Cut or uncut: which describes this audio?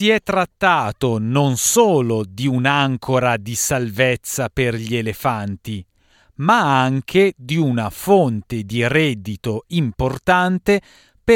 uncut